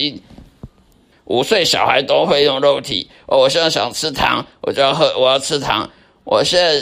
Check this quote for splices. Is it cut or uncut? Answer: cut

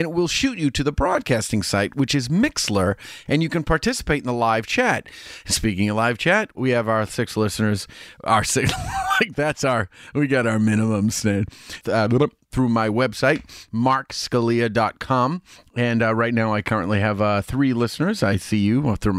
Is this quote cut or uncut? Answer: cut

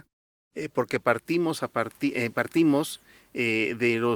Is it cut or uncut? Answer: uncut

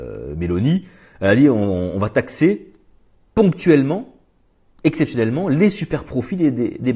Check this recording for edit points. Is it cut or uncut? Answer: uncut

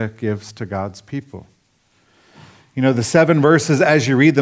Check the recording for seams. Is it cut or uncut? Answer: uncut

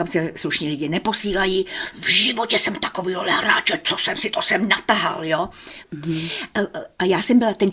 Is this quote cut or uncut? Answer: cut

